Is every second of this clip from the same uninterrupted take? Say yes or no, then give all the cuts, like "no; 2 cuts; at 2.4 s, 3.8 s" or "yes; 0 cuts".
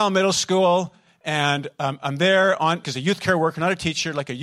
no; 1 cut; at 2.8 s